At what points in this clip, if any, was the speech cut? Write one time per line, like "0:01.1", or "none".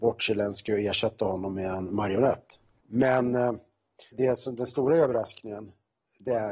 0:02.7
0:04.1